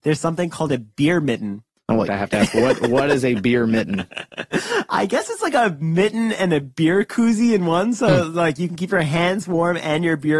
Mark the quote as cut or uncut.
cut